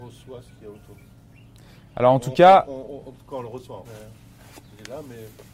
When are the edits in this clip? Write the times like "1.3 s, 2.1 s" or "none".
3.8 s